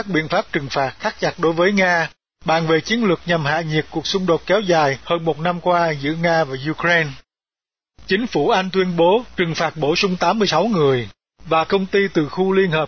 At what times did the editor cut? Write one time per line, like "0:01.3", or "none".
none